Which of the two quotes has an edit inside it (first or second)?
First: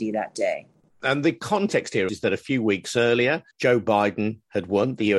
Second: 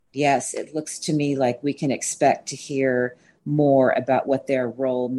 first